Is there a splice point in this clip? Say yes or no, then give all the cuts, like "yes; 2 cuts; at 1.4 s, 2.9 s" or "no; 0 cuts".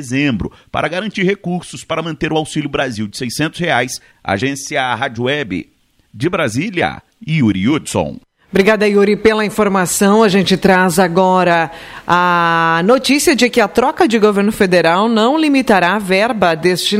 no; 0 cuts